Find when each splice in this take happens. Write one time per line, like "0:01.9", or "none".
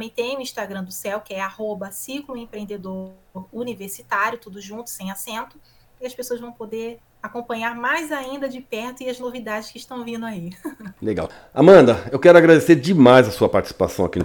0:06.0